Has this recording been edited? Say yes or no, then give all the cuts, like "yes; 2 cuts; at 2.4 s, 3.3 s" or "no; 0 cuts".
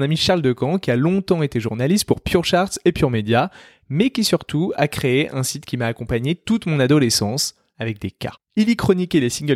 yes; 1 cut; at 7.7 s